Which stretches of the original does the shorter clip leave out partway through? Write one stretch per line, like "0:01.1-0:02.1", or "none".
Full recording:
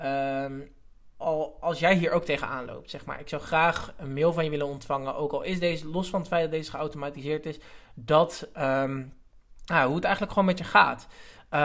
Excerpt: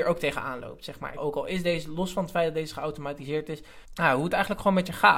0:03.2-0:05.1
0:07.8-0:09.6